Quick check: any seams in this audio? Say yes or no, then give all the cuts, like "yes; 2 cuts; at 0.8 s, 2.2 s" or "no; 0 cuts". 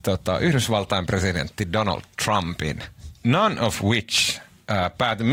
yes; 1 cut; at 3.2 s